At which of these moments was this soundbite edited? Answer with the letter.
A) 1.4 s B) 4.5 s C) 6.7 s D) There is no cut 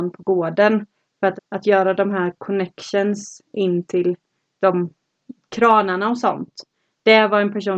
A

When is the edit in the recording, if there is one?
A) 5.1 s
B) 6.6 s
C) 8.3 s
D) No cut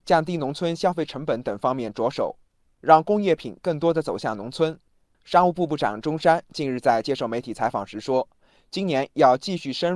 A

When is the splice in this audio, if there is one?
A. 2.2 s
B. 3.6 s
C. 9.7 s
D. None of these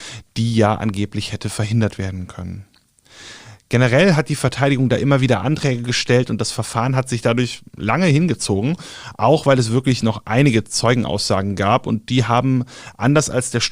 D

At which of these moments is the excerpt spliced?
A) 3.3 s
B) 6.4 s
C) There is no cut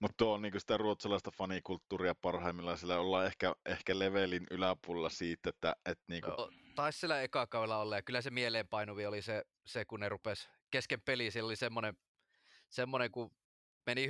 B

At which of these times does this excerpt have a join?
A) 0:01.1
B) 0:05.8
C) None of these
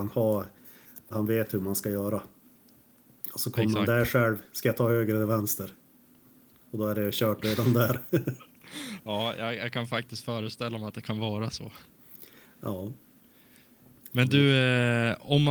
A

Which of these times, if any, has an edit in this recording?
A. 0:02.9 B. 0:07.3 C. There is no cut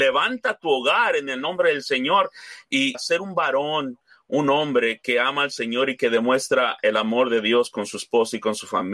A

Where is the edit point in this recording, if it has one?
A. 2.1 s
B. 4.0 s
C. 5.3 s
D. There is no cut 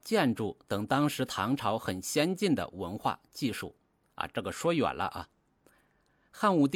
B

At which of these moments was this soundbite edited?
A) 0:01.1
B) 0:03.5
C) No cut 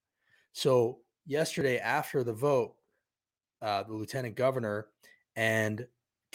B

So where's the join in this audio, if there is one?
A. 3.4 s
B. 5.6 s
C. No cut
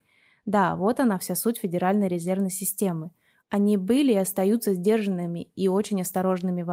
A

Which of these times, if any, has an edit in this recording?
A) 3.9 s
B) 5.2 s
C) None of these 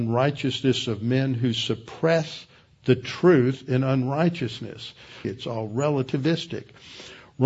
B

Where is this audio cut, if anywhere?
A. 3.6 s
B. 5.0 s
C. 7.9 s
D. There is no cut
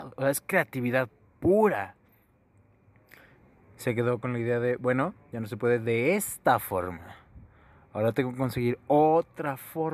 A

